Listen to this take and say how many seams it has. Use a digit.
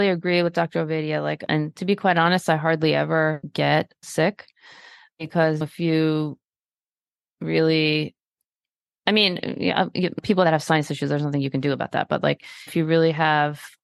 0